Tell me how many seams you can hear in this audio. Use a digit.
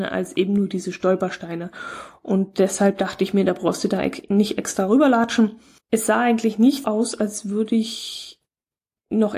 2